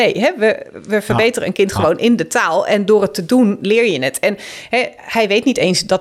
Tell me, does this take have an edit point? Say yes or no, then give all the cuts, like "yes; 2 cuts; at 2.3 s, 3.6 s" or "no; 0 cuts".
no; 0 cuts